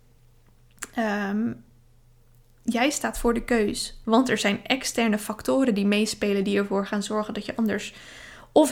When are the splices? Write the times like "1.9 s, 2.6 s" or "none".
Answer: 4.0 s